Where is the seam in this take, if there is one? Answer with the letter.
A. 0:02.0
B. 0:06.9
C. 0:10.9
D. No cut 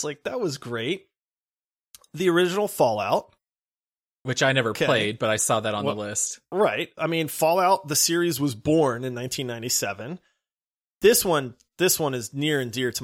D